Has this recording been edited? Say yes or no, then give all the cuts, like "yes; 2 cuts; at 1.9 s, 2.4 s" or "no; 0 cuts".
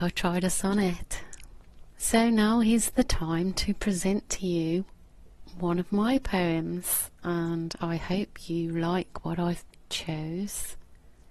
yes; 1 cut; at 1.9 s